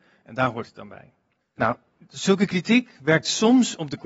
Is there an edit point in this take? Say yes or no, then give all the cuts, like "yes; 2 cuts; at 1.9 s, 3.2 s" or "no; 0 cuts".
yes; 1 cut; at 1.4 s